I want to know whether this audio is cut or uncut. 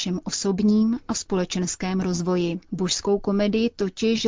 cut